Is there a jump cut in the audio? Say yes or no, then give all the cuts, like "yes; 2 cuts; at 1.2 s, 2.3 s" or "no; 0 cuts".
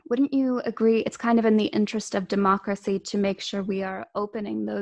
no; 0 cuts